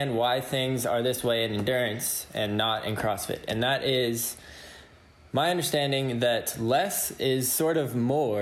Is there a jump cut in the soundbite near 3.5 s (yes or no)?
no